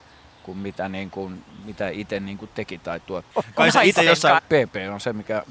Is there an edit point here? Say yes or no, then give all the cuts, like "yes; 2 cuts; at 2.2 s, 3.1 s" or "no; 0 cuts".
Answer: yes; 2 cuts; at 3.3 s, 4.4 s